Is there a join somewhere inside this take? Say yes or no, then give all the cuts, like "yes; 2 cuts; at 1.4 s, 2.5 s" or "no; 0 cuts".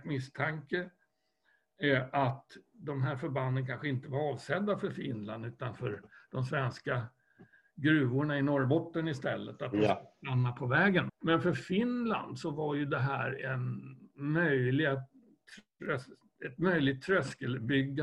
yes; 1 cut; at 11.1 s